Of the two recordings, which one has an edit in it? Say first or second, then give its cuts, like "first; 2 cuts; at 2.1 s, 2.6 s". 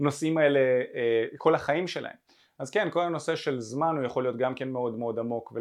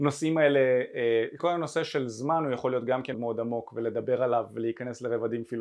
second; 2 cuts; at 1.4 s, 3.1 s